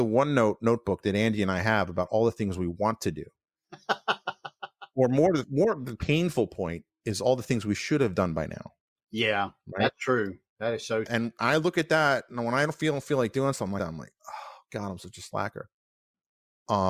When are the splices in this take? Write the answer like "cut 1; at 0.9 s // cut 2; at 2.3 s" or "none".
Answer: cut 1; at 11.1 s // cut 2; at 13.8 s